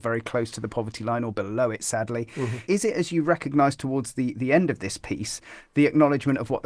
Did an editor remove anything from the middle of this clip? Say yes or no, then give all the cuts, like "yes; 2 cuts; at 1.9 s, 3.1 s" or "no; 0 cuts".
yes; 1 cut; at 2.7 s